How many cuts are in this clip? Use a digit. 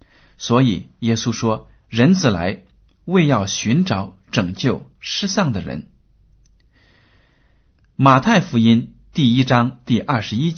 0